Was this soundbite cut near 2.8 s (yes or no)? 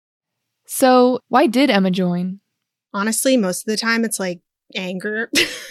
no